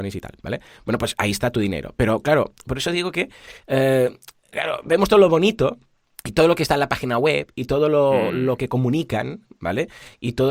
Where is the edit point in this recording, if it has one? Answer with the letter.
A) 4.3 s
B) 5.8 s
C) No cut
C